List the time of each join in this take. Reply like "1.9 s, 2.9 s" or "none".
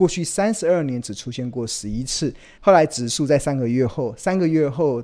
2.6 s